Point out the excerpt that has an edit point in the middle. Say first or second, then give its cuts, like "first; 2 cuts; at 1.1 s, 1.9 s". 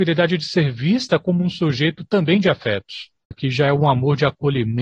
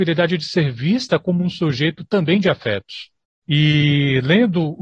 first; 1 cut; at 3.3 s